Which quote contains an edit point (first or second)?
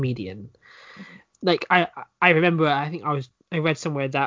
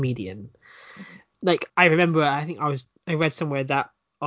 second